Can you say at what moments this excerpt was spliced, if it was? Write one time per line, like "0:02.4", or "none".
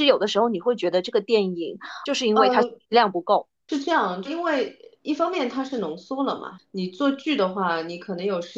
0:04.2